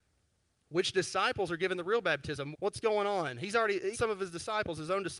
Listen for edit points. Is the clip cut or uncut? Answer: cut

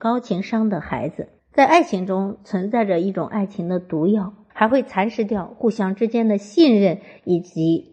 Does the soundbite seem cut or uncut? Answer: cut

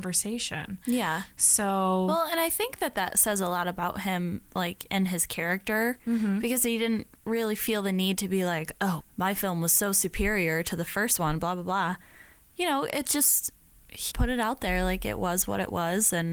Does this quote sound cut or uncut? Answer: cut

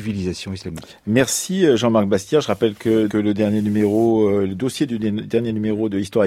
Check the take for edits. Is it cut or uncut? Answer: cut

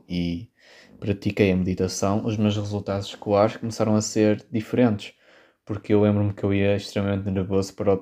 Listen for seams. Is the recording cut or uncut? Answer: uncut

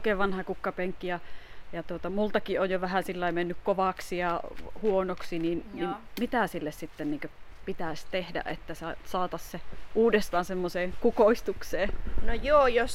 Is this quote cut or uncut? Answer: uncut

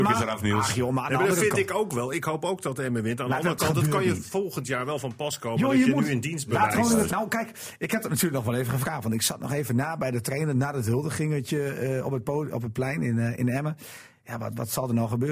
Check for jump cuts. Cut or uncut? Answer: cut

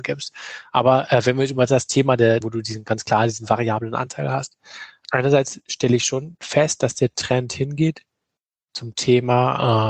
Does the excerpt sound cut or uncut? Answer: cut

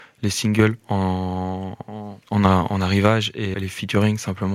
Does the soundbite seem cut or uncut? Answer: cut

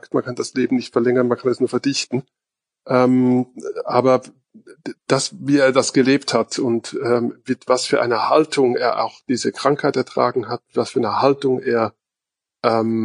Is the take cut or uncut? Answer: uncut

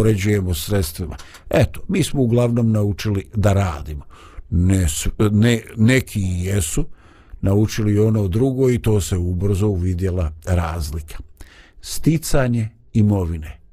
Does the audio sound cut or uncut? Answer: uncut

